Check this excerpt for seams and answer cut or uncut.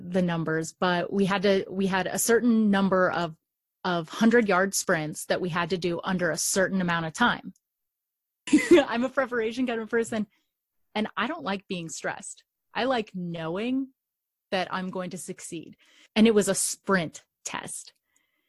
cut